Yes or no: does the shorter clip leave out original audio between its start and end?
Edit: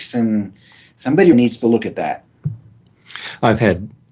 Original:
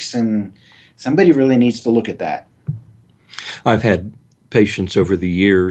yes